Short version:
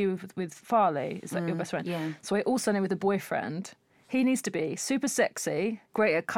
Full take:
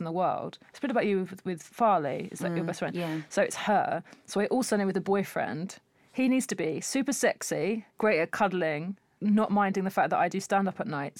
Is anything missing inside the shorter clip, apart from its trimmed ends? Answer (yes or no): yes